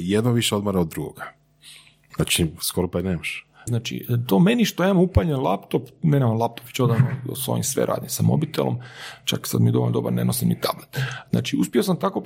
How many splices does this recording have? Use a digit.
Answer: 2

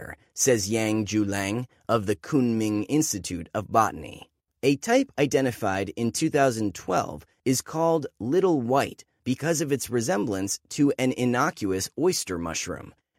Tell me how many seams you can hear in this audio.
1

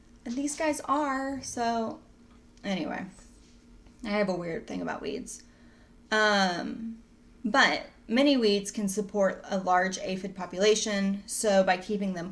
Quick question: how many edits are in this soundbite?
0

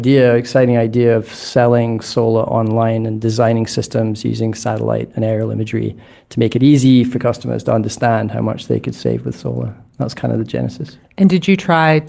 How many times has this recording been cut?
0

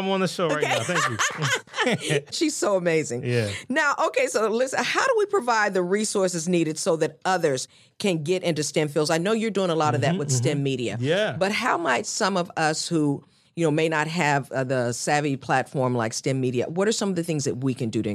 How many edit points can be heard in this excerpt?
0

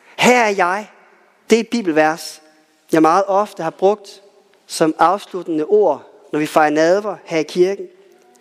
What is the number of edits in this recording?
1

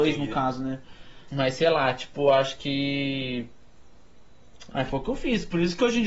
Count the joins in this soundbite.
2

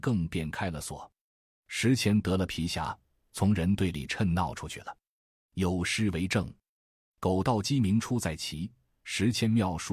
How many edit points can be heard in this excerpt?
0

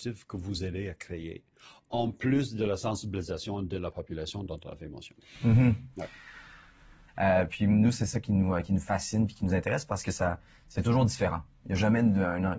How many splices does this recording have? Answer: 1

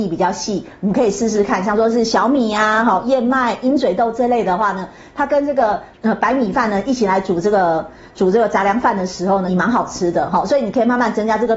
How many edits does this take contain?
2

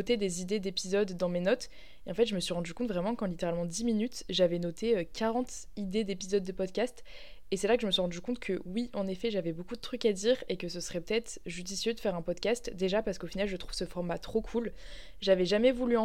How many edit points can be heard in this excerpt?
0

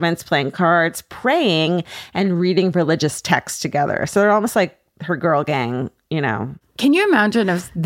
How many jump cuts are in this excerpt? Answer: 1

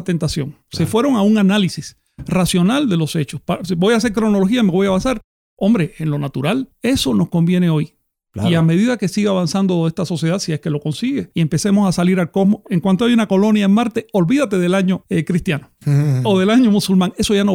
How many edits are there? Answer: 1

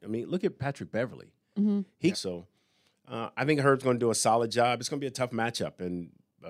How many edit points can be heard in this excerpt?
1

